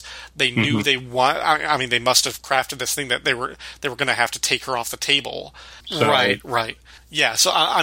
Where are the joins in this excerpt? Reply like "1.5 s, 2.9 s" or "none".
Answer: 5.8 s